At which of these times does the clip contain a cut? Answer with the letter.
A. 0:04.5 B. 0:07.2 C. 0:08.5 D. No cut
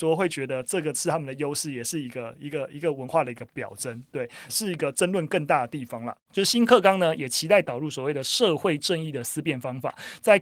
A